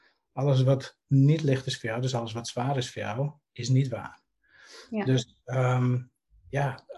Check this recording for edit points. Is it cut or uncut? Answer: uncut